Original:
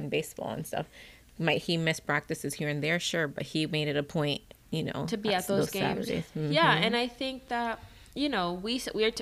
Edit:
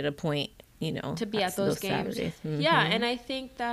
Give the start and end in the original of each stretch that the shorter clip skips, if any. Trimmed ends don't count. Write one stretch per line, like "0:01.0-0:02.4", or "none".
none